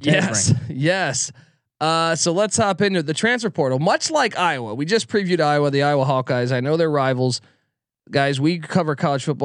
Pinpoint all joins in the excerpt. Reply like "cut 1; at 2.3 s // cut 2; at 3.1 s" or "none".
none